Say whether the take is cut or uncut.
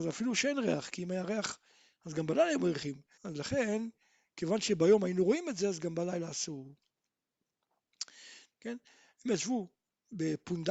cut